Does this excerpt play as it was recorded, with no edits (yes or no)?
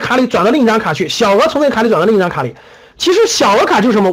yes